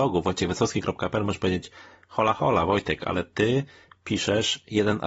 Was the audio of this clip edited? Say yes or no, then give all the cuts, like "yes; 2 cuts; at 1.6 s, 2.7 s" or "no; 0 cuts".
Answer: no; 0 cuts